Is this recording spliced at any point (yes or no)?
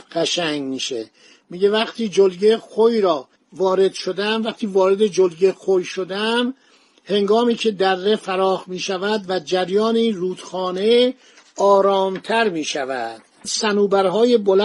no